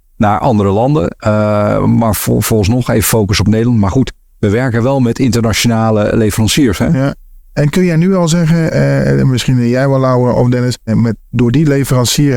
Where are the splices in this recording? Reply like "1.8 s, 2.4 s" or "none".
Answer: 10.9 s